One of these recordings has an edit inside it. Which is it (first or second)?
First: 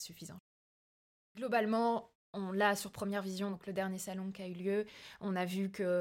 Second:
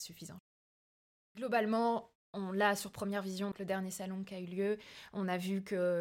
second